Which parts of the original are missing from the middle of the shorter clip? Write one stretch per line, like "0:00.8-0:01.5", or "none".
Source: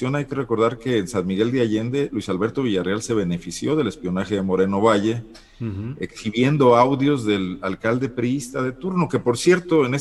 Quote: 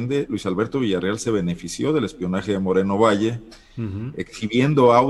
none